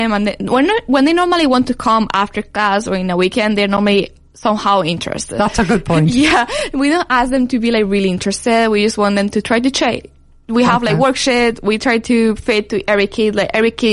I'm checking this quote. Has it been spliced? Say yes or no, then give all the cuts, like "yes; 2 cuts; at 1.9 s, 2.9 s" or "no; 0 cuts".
no; 0 cuts